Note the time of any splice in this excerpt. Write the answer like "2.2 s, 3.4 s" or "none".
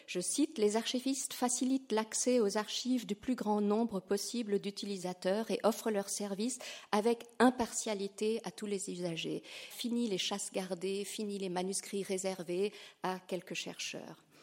9.7 s